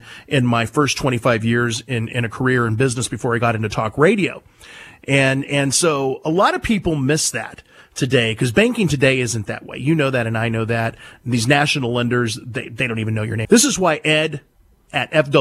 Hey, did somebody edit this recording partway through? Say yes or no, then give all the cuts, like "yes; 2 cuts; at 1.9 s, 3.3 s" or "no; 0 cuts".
yes; 1 cut; at 13.4 s